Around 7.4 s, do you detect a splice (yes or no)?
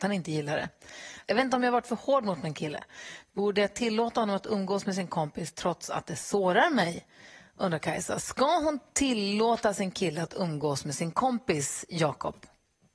no